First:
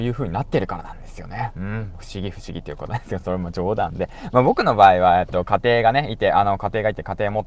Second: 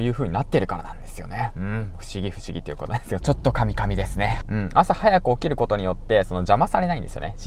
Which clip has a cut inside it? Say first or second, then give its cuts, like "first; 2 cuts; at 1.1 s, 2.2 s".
second; 2 cuts; at 3.2 s, 4.4 s